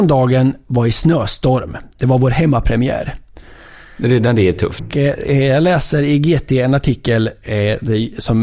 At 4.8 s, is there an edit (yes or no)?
yes